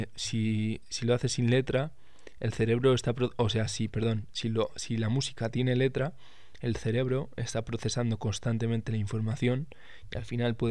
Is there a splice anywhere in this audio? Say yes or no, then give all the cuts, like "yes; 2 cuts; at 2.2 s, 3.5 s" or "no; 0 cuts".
no; 0 cuts